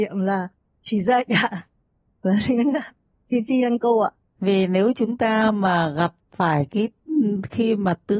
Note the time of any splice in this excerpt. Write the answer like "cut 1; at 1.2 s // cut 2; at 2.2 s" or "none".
cut 1; at 4.2 s